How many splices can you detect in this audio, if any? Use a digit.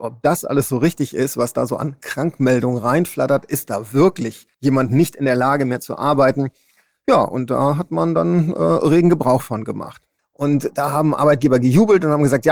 2